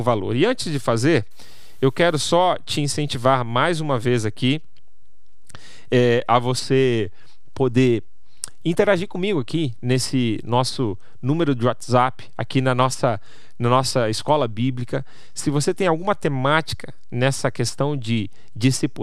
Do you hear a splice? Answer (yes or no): no